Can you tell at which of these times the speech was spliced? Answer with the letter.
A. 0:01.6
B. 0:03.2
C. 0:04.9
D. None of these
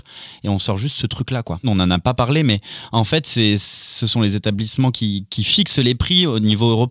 A